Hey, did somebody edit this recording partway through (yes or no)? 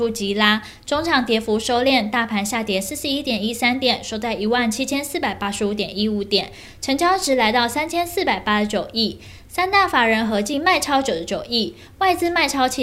no